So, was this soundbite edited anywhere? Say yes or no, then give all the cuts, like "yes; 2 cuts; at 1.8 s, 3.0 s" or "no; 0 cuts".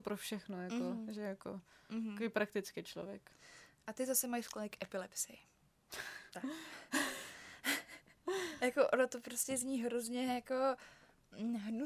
no; 0 cuts